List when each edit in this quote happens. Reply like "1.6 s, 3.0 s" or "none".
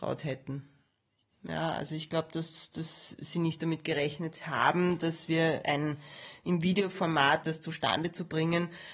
1.3 s, 5.6 s, 7.4 s